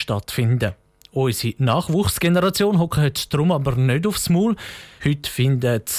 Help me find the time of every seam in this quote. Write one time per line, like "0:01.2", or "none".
0:05.0